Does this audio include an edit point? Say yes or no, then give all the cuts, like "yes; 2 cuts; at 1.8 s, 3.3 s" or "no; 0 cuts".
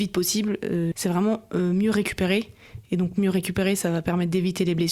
yes; 1 cut; at 0.9 s